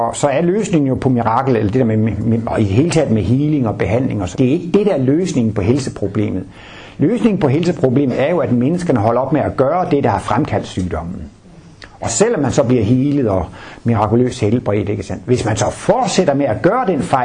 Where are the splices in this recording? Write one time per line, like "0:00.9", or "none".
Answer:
0:04.3